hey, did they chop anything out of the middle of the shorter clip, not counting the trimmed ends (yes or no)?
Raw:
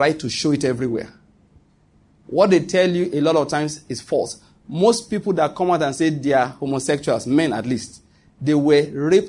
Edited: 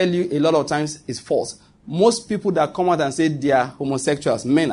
no